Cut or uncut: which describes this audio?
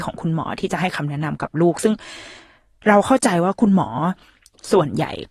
uncut